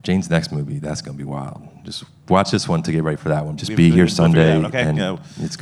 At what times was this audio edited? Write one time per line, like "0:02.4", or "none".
0:03.6